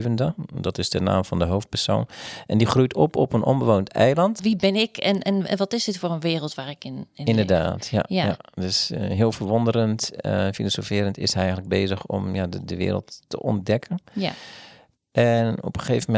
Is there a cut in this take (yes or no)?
yes